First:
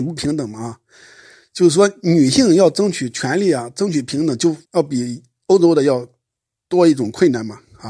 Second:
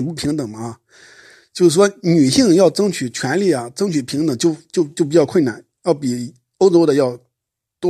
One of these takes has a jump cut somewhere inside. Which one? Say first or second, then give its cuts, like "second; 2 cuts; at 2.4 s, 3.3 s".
first; 1 cut; at 4.6 s